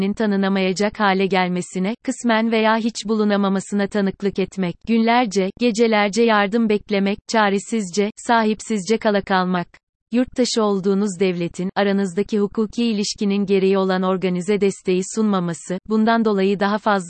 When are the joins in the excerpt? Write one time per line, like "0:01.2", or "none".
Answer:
0:04.8